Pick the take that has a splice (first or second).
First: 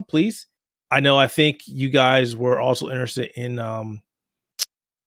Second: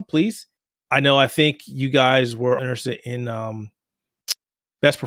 second